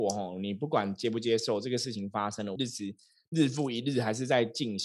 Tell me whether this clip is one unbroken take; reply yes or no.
no